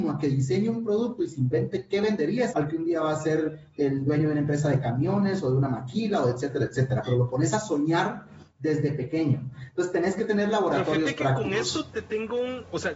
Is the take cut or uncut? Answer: cut